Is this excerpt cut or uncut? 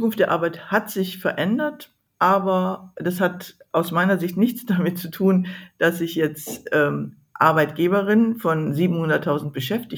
uncut